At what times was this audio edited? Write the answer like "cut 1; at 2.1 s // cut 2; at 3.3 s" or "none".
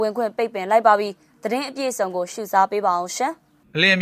none